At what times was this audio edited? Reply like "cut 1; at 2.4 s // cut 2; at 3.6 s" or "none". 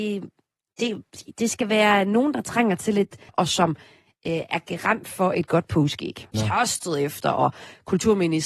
cut 1; at 3.3 s // cut 2; at 6.3 s